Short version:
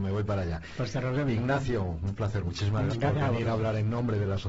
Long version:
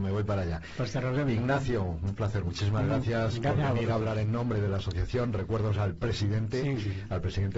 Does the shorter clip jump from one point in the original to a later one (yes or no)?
yes